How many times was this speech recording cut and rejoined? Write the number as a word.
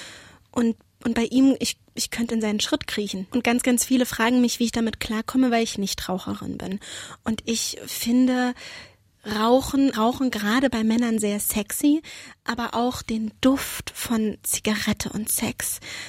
two